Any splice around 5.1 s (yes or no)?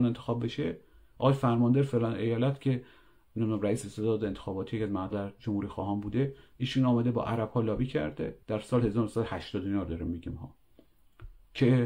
yes